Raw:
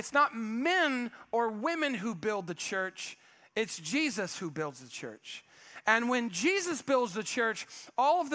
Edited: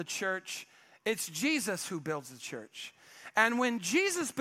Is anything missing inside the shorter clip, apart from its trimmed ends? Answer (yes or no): no